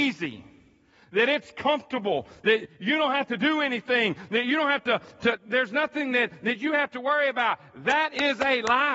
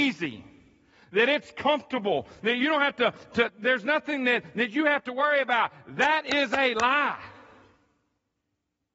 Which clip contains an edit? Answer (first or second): second